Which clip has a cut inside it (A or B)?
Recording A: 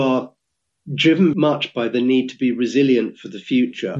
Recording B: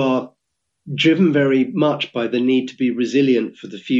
A